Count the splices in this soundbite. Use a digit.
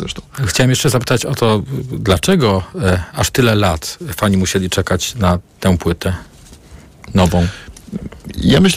0